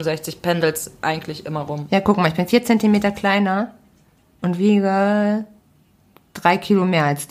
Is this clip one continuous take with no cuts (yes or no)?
yes